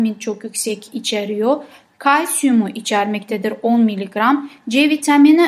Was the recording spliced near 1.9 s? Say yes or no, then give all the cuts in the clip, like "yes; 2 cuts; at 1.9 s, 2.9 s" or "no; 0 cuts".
no; 0 cuts